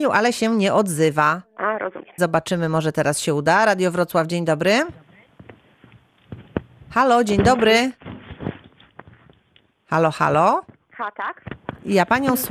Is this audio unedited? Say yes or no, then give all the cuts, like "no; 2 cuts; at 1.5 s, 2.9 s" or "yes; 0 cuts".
no; 1 cut; at 2.2 s